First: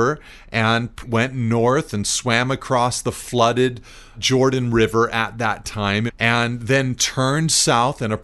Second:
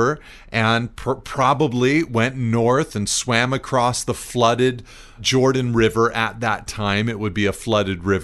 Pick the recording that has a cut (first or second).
first